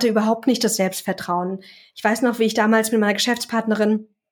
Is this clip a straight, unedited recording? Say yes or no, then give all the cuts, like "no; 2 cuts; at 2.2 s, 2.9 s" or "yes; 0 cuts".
yes; 0 cuts